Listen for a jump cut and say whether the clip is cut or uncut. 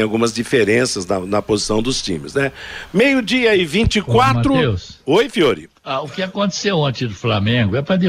cut